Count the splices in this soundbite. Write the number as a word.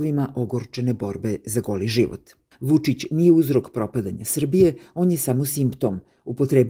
one